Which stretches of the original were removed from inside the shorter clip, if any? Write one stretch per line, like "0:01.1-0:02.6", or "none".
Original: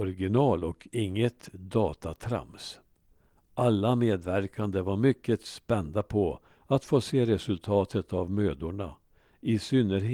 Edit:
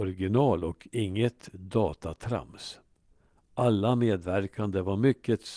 none